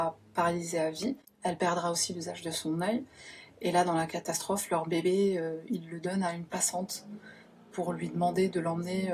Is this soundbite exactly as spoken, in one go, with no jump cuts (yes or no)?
yes